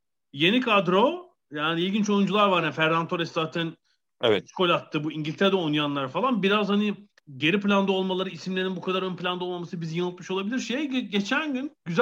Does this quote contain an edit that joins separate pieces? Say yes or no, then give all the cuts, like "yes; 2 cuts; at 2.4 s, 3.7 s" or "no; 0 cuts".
no; 0 cuts